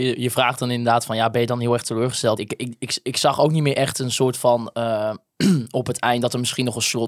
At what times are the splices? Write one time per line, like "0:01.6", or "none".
0:02.4

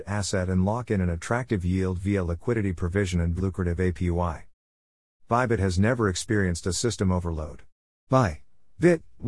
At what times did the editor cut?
0:03.4
0:05.1
0:08.1

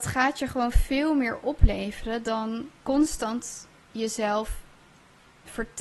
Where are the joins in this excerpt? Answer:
0:02.8

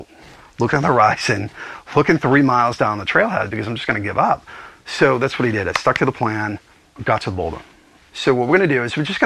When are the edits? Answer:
0:08.1

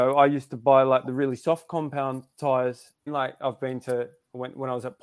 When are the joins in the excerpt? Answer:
0:03.1

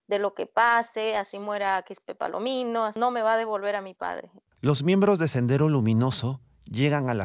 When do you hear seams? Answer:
0:04.5

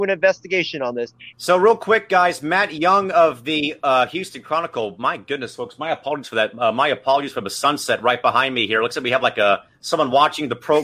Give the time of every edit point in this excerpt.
0:01.3

